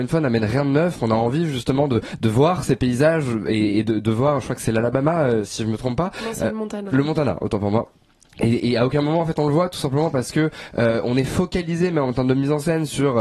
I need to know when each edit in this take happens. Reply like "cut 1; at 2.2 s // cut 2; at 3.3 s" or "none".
none